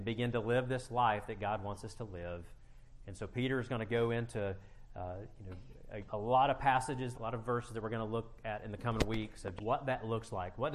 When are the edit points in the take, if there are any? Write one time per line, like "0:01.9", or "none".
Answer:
0:06.1
0:07.1
0:09.6